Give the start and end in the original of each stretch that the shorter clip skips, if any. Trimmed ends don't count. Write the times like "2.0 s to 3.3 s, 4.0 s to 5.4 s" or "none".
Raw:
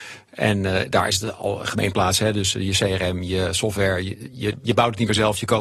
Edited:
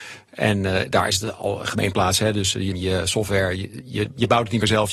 2.7 s to 3.2 s